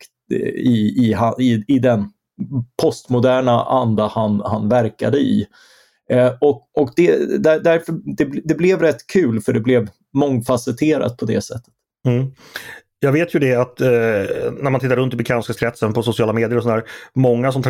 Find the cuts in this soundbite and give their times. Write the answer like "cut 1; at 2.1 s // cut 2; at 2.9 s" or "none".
none